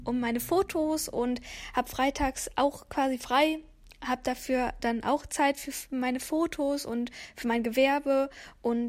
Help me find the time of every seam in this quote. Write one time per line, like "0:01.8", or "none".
none